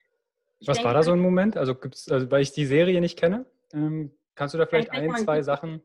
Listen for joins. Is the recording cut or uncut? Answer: uncut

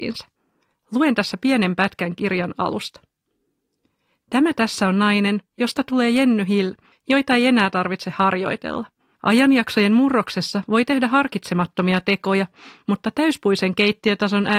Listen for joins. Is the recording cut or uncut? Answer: cut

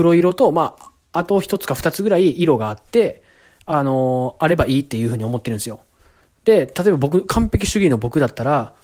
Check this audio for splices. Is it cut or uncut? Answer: uncut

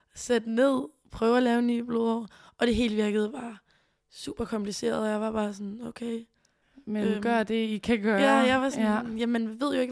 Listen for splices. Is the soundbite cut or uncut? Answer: uncut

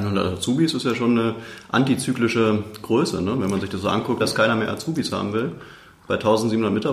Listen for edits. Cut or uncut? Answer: cut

